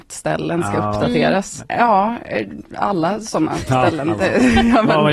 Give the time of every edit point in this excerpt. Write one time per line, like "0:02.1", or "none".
0:01.6